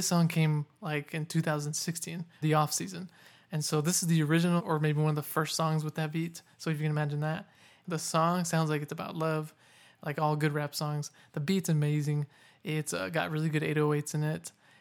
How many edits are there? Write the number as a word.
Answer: two